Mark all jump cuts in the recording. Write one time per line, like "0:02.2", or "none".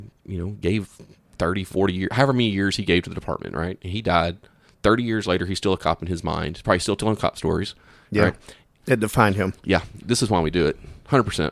0:08.8
0:10.0